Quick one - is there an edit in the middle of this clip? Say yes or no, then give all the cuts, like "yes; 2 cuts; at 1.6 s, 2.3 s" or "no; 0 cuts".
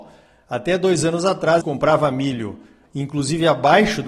yes; 1 cut; at 1.6 s